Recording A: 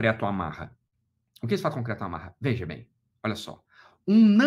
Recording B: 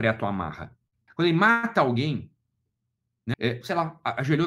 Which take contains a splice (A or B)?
B